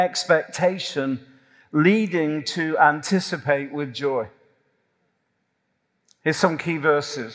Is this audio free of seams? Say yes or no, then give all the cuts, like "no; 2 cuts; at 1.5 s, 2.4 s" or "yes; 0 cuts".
yes; 0 cuts